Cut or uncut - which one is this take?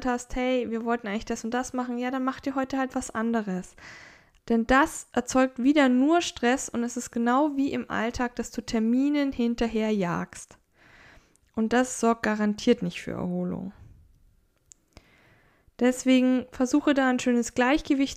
cut